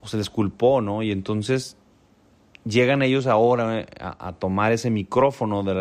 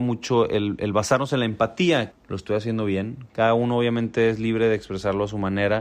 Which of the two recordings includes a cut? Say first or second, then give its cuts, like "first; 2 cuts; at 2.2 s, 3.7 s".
second; 2 cuts; at 2.1 s, 3.3 s